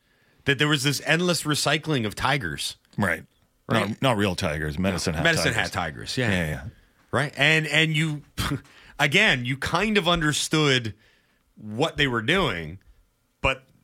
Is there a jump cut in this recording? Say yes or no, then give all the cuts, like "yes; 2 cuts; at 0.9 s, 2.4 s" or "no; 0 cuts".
yes; 1 cut; at 2.9 s